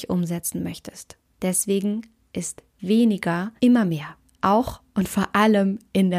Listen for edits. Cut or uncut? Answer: cut